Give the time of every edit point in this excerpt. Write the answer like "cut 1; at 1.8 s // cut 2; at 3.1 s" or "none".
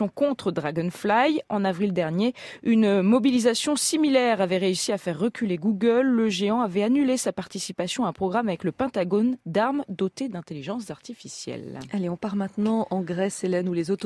none